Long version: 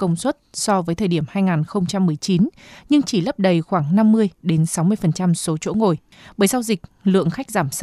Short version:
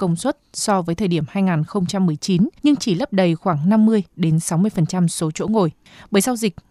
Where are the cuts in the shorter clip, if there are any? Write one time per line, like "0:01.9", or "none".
0:02.6